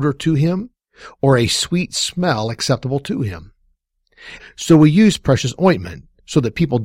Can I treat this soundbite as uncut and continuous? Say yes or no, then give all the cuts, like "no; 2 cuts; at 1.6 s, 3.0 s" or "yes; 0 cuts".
no; 1 cut; at 4.4 s